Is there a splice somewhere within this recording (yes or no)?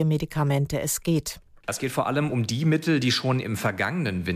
no